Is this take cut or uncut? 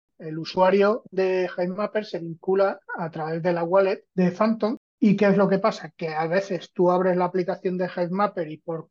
cut